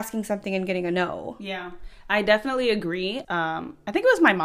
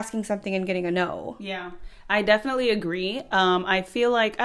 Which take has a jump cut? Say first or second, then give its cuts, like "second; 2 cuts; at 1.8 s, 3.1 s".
first; 1 cut; at 3.2 s